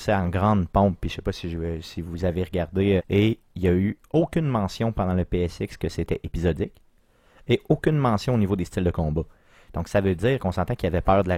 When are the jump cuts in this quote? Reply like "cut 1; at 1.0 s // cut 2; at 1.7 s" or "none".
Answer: cut 1; at 3.0 s